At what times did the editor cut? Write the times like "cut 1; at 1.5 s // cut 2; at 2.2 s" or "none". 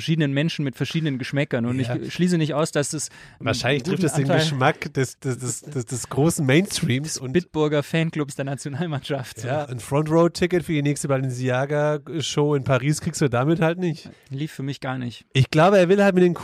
cut 1; at 9.6 s // cut 2; at 14.1 s